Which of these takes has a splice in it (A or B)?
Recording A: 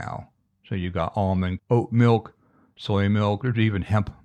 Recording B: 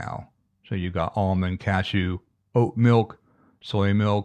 A